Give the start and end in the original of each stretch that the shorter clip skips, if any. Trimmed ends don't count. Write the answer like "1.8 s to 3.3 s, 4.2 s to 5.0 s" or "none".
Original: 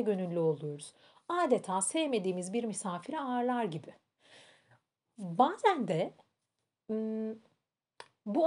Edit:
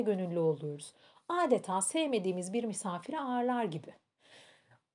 none